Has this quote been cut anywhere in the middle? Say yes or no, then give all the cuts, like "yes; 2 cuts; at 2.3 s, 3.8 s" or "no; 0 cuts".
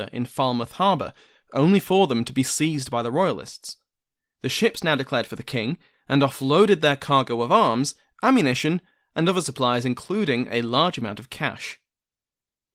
no; 0 cuts